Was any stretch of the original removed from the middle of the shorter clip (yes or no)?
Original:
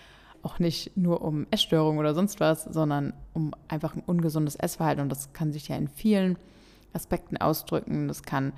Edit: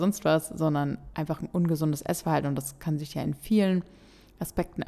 yes